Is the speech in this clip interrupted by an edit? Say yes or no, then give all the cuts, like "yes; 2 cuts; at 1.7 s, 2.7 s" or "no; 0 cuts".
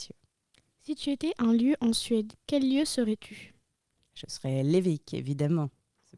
no; 0 cuts